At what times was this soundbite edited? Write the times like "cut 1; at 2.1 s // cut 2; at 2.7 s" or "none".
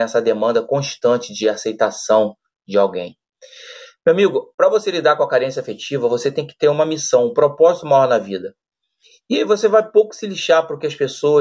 none